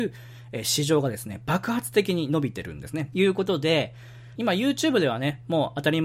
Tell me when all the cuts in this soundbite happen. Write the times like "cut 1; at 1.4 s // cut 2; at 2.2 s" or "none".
cut 1; at 3.1 s // cut 2; at 4.4 s